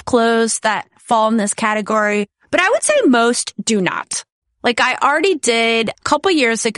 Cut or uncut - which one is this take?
cut